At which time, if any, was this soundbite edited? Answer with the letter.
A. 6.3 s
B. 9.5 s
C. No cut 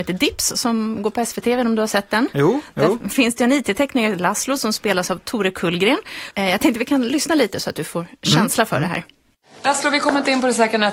A